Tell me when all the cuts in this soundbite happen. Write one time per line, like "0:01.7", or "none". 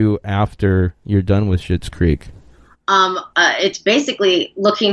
0:03.3